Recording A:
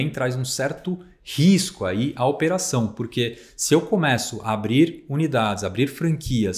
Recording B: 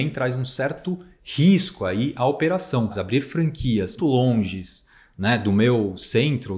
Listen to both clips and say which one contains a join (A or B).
B